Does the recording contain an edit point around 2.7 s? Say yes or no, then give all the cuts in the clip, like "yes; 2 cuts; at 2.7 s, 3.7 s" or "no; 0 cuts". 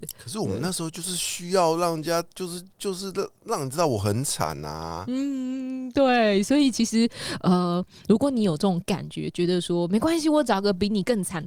yes; 1 cut; at 2.7 s